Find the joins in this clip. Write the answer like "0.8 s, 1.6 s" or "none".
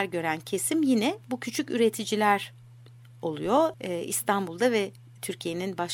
3.7 s